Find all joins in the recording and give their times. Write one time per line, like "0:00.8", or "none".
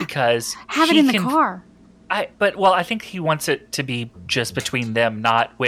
0:02.3

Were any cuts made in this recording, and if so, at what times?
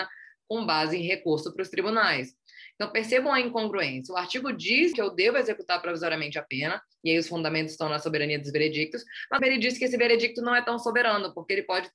0:04.9
0:09.4

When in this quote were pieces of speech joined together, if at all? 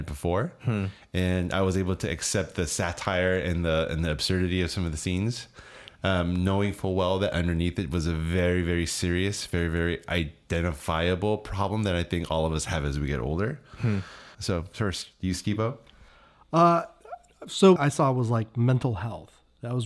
0:14.3
0:17.8

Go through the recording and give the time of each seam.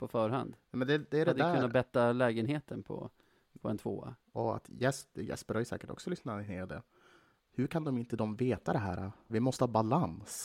0:04.2
0:09.3

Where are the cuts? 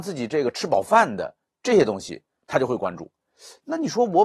none

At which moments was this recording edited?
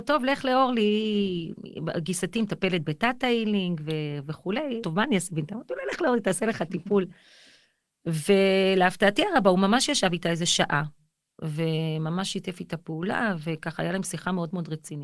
0:04.8

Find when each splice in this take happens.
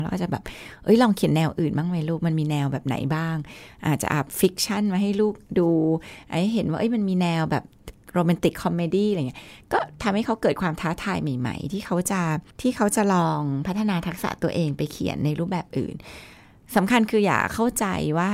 0:12.5

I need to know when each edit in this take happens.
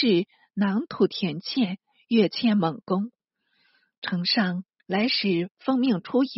0:04.8

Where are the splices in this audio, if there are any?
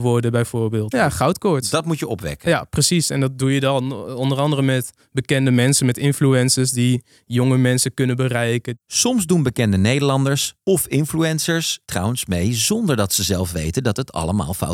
0:00.9

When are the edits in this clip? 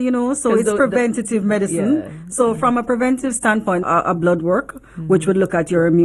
0:03.8

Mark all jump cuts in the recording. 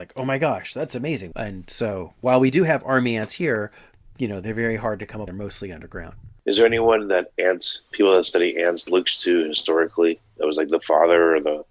0:01.3

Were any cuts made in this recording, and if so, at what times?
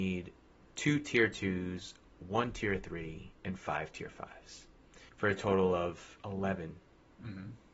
0:03.3
0:05.1

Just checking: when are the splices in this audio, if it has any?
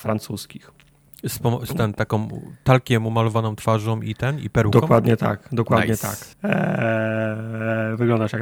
0:06.3

